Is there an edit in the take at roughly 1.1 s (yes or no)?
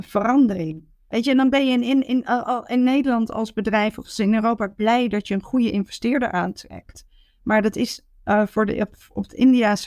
yes